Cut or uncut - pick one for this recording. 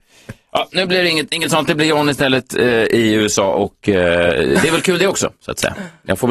uncut